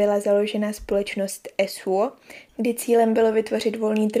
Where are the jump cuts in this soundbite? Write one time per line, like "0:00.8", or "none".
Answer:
0:02.5